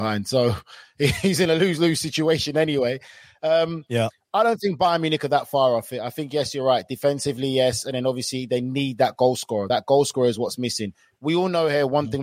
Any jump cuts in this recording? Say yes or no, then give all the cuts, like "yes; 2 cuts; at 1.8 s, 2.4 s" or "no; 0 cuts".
no; 0 cuts